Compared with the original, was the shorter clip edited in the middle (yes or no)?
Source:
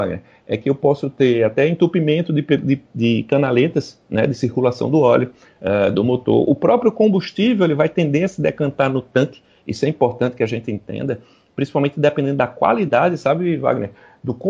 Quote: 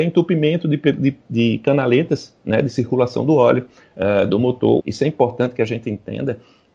yes